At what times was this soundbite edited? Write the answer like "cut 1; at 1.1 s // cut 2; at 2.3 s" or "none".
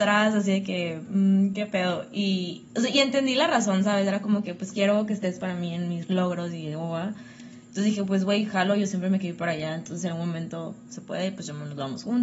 none

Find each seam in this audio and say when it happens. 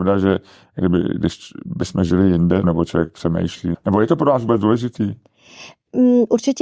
cut 1; at 2.6 s // cut 2; at 3.7 s

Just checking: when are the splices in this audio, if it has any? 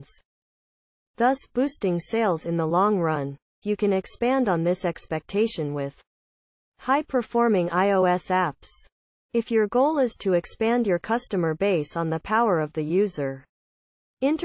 cut 1; at 3.6 s

